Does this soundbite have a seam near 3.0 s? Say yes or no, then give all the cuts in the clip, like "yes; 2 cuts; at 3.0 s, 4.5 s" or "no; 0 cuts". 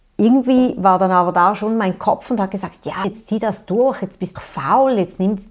yes; 2 cuts; at 3.0 s, 4.4 s